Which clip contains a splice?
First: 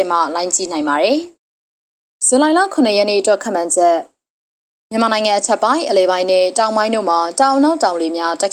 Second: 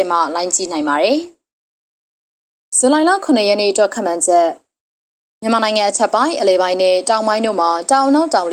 first; 1 cut; at 1.4 s

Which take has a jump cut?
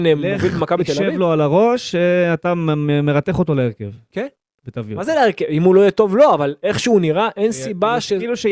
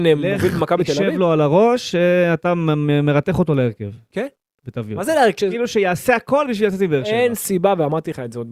second; 1 cut; at 5.4 s

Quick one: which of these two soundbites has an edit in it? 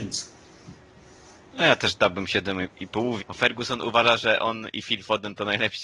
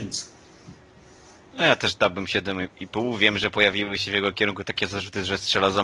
first; 1 cut; at 3.2 s

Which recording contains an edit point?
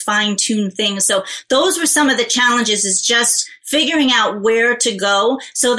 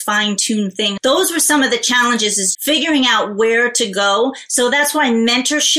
second; 2 cuts; at 1.0 s, 2.5 s

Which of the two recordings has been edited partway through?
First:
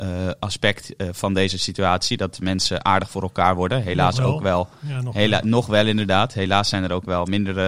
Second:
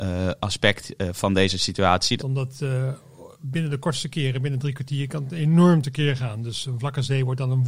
second; 1 cut; at 2.2 s

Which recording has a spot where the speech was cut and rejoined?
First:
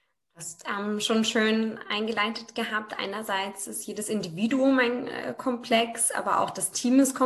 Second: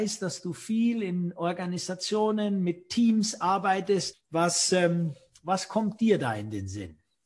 second; 1 cut; at 4.1 s

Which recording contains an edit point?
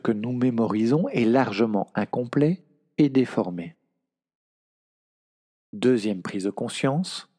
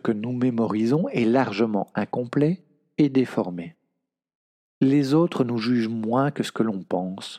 second; 1 cut; at 4.6 s

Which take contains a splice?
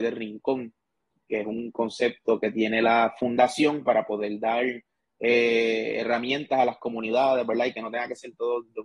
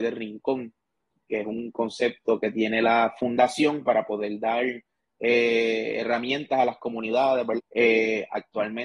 second; 1 cut; at 7.6 s

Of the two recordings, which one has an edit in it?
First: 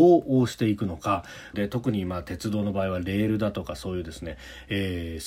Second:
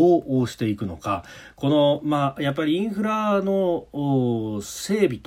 first; 1 cut; at 1.5 s

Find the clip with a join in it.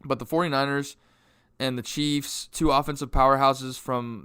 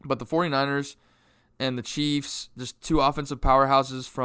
first; 1 cut; at 2.5 s

